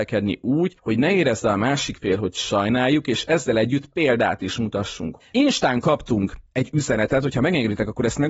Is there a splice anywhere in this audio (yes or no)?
yes